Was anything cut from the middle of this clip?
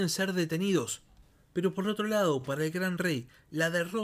no; 0 cuts

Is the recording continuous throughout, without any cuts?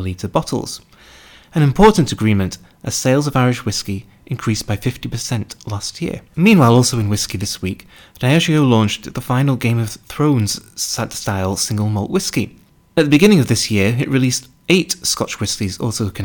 no; 2 cuts; at 1.4 s, 6.3 s

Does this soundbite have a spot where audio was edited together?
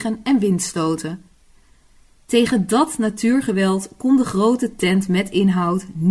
no; 0 cuts

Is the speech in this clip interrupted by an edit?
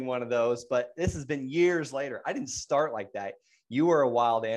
no; 0 cuts

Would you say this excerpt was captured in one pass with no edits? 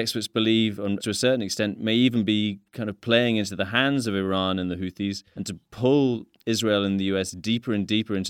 no; 2 cuts; at 1.0 s, 5.4 s

